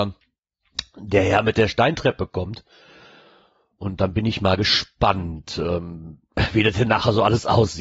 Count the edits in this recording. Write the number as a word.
zero